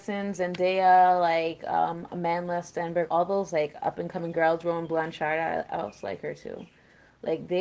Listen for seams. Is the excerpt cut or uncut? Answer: cut